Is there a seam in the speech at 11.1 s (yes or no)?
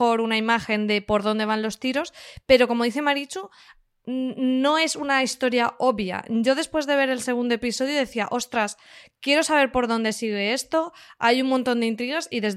no